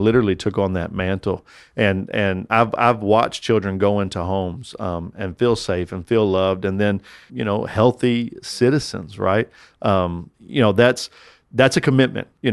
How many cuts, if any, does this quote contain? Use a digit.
1